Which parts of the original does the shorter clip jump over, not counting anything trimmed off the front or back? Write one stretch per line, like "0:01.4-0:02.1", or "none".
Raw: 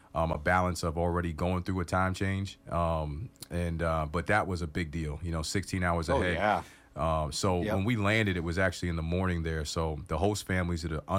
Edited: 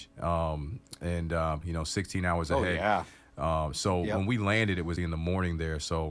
0:04.1-0:05.2
0:08.5-0:08.8

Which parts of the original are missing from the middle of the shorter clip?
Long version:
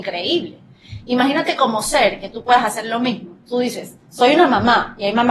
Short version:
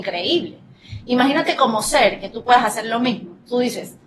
none

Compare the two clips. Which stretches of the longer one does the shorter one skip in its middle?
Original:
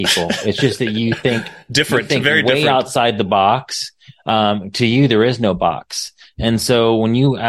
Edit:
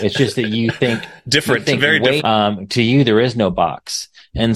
0:02.6-0:04.2

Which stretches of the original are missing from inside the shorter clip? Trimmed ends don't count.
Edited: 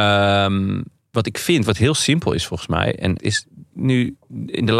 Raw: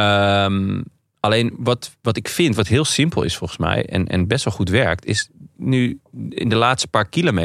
0:01.1-0:02.0
0:04.1-0:05.0

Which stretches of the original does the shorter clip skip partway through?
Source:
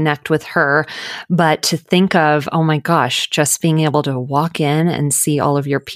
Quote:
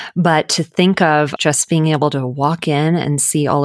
0:02.5-0:03.3

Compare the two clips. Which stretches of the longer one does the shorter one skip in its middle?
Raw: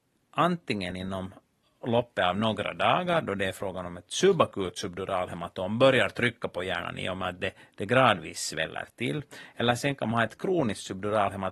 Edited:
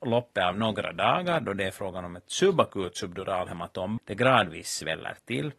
0:05.8-0:07.7

